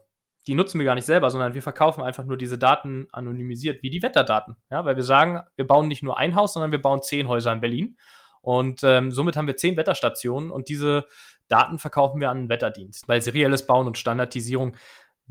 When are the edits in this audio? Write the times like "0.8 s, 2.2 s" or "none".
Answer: 13.0 s